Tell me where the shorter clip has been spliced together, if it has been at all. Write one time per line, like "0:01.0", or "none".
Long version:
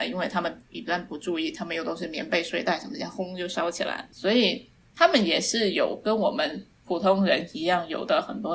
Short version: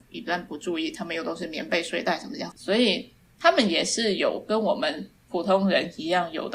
0:02.5